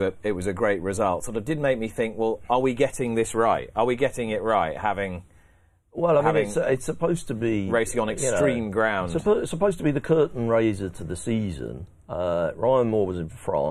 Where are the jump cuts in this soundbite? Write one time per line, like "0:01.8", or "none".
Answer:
none

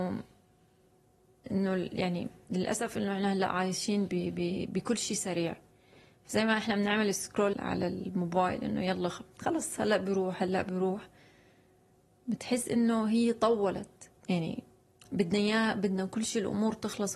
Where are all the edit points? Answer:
0:07.5

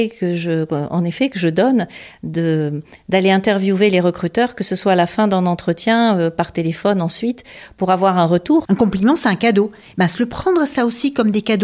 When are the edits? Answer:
0:08.7

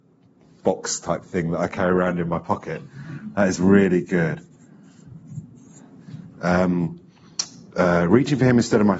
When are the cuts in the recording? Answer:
none

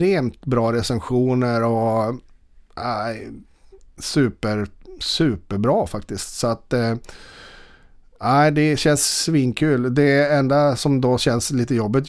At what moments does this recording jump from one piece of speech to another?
none

